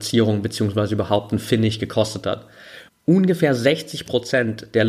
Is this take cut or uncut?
cut